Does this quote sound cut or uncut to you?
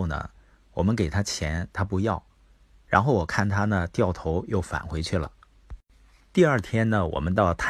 uncut